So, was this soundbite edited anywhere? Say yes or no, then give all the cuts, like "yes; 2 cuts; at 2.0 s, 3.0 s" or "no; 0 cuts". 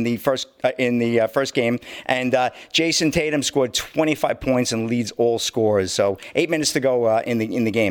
no; 0 cuts